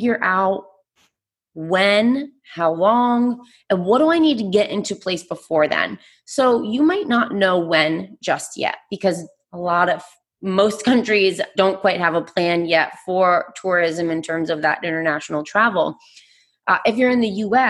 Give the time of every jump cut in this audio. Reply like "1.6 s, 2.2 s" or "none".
11.5 s